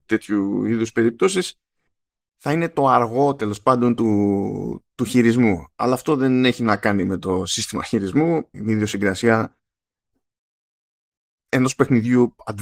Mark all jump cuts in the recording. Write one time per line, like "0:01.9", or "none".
0:08.5